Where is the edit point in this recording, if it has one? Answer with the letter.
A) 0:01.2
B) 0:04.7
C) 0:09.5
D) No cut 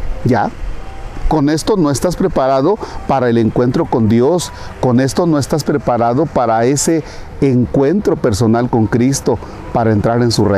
D